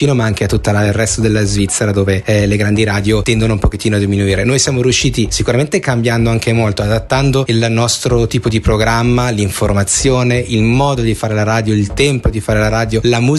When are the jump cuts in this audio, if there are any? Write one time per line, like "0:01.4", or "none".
none